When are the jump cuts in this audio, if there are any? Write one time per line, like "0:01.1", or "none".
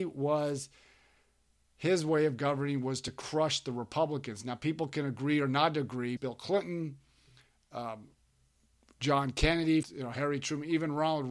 0:06.2
0:09.8